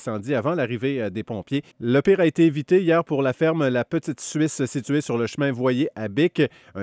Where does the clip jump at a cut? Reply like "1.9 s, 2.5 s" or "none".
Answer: 1.7 s

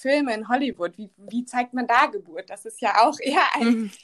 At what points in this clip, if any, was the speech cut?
none

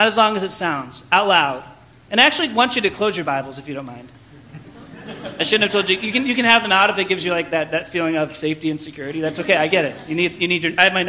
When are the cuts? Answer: none

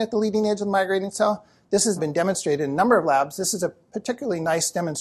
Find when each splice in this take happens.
2.0 s

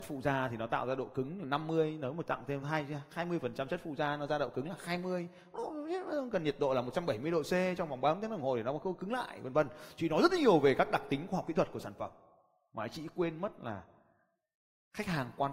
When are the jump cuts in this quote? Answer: none

